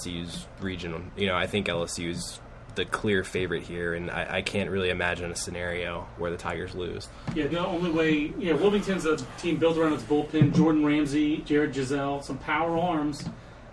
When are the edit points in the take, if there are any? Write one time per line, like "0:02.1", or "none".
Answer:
0:07.5
0:11.4